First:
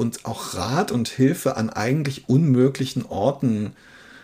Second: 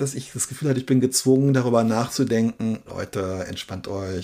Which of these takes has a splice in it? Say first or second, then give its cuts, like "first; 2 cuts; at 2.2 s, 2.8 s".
second; 1 cut; at 2.9 s